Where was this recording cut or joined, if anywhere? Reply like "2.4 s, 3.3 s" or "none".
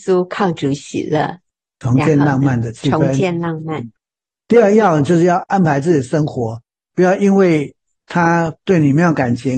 4.4 s